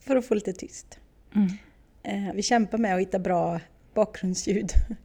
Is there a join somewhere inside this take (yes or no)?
yes